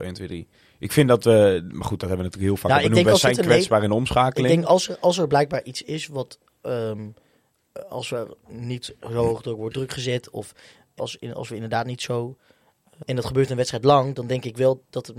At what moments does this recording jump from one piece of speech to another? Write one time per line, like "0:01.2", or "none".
0:11.0
0:13.0